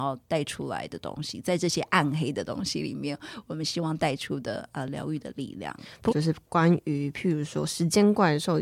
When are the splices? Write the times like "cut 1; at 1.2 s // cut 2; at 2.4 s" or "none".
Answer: cut 1; at 6.1 s